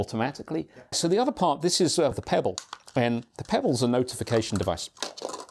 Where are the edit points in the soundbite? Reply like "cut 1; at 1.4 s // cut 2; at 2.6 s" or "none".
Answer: cut 1; at 0.9 s // cut 2; at 2.1 s

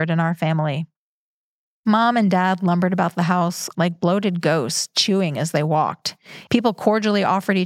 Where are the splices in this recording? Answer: cut 1; at 3.7 s // cut 2; at 6.5 s

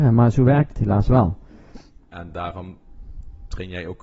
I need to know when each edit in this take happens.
cut 1; at 2.0 s

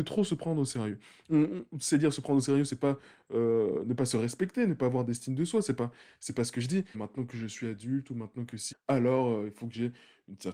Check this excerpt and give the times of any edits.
cut 1; at 6.9 s // cut 2; at 8.7 s

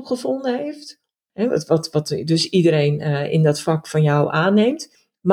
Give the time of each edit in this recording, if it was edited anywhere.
cut 1; at 1.3 s

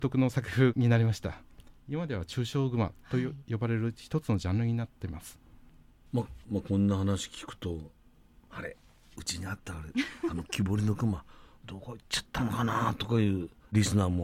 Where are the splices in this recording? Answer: cut 1; at 6.4 s

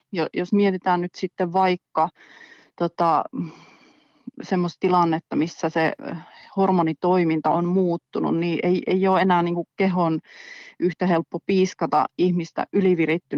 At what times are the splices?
none

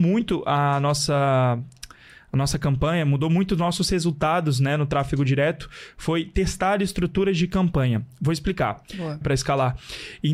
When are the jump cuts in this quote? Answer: cut 1; at 9.2 s

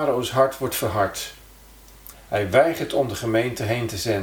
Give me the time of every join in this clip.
cut 1; at 2.1 s

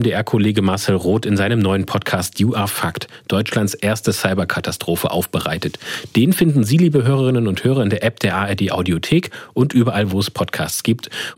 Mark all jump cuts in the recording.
none

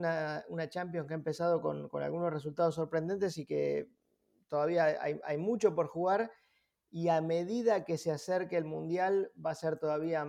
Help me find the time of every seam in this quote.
none

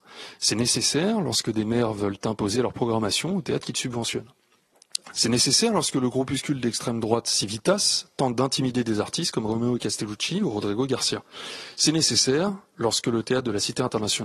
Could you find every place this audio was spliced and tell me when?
cut 1; at 5.1 s

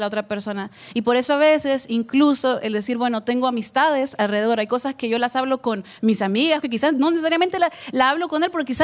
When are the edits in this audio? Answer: cut 1; at 6.6 s

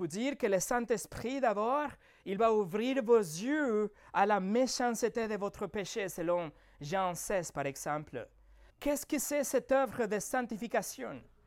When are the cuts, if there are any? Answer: cut 1; at 8.7 s

